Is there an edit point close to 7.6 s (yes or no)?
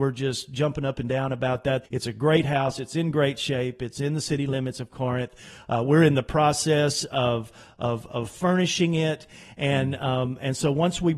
no